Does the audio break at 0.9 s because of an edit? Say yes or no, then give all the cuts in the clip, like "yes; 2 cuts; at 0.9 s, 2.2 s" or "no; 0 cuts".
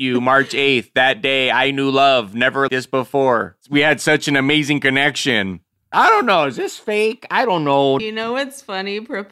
no; 3 cuts; at 2.7 s, 5.9 s, 8.0 s